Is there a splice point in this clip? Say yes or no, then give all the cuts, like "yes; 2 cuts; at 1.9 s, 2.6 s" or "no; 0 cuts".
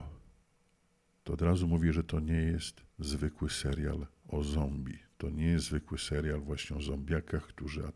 no; 0 cuts